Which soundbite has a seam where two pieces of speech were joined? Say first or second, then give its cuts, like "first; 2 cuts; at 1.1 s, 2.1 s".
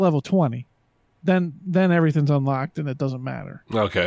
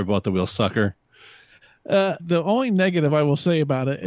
second; 1 cut; at 2.2 s